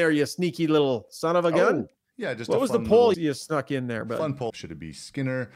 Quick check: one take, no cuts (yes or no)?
no